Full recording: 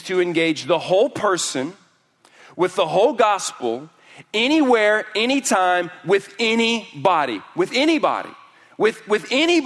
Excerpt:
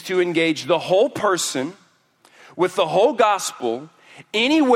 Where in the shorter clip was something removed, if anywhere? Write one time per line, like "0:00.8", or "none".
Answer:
none

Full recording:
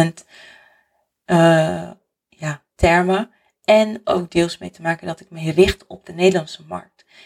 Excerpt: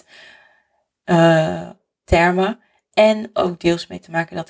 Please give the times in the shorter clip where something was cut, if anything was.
0:02.0

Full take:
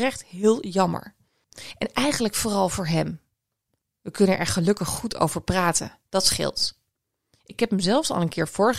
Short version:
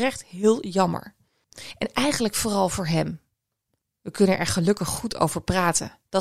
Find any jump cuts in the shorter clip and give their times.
none

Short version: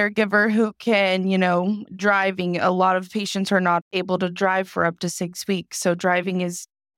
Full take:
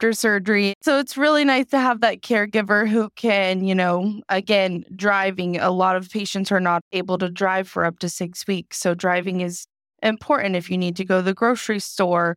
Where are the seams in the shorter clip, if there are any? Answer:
0:01.9

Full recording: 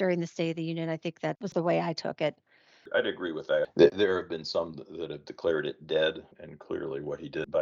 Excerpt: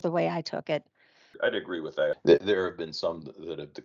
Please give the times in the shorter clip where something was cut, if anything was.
none

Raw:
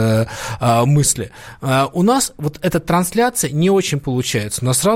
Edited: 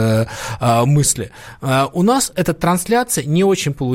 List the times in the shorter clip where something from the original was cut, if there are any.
0:02.3

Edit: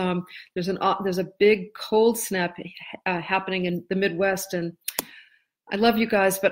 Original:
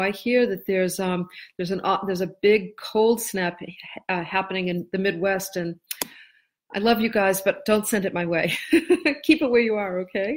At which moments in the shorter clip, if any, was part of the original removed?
none

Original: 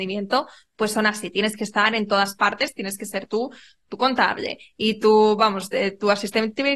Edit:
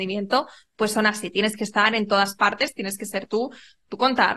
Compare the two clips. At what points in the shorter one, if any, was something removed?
none

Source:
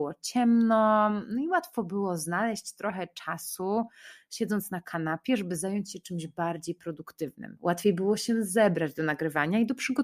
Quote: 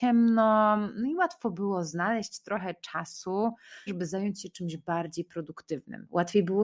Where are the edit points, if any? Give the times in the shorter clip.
0:03.9

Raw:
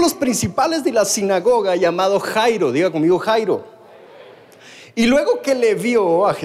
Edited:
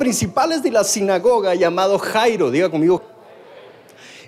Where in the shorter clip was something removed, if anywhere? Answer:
0:03.0

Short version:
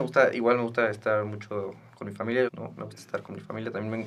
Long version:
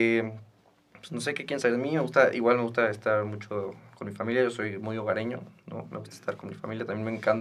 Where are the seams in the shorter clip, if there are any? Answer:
0:02.5

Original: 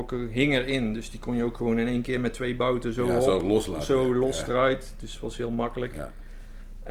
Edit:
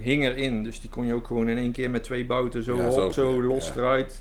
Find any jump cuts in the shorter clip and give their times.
0:03.1

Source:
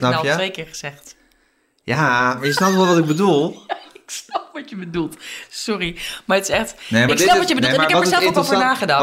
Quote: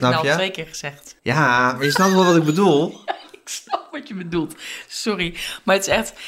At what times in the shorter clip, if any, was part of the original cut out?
0:01.2

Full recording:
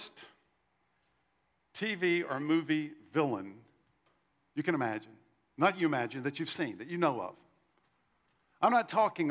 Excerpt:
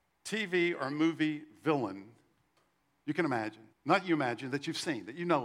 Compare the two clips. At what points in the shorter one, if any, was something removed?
0:03.7

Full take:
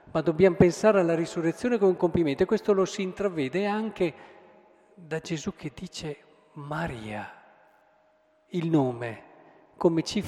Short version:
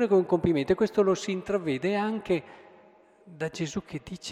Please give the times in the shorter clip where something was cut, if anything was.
none

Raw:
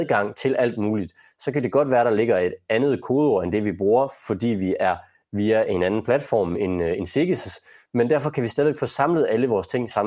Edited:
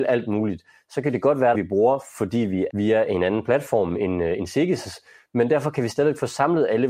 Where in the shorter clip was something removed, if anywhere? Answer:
0:01.5
0:02.7

